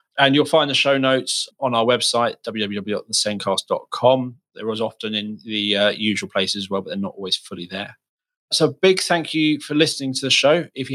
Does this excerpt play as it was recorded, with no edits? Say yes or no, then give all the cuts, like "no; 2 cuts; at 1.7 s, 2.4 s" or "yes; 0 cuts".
yes; 0 cuts